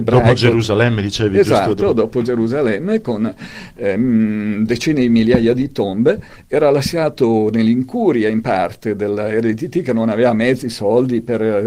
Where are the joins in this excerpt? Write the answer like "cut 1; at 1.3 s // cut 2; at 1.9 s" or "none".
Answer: none